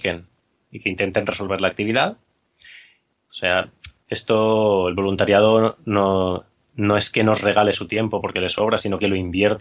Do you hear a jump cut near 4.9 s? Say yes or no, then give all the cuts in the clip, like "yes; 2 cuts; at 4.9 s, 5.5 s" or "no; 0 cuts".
no; 1 cut; at 3.3 s